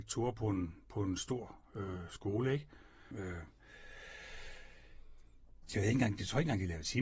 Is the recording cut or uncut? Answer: cut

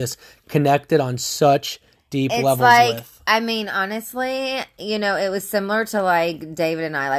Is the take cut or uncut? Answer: uncut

